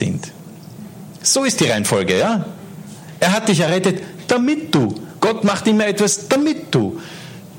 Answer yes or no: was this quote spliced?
no